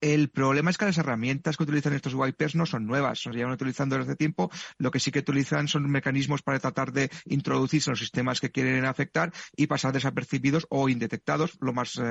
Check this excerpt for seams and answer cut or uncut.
uncut